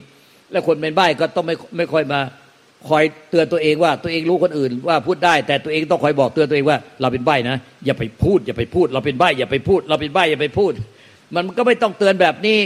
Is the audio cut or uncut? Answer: uncut